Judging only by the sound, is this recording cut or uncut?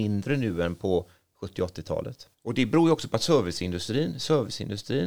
cut